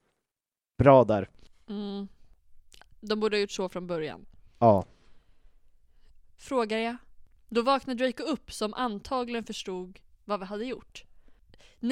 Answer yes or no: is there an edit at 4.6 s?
no